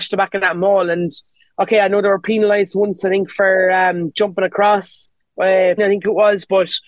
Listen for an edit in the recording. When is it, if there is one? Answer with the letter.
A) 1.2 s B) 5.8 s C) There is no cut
B